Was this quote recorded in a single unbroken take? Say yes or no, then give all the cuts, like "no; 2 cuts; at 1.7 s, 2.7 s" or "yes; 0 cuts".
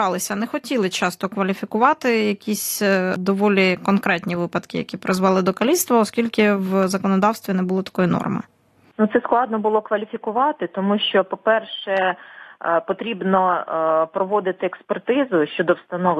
yes; 0 cuts